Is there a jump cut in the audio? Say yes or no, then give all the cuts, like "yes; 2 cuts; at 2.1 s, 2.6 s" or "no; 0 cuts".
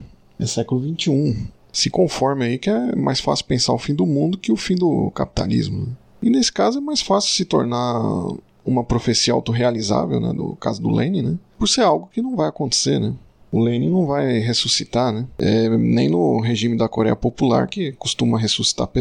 no; 0 cuts